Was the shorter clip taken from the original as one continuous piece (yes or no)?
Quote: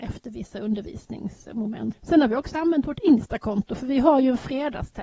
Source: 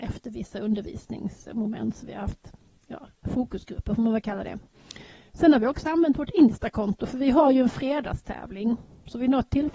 no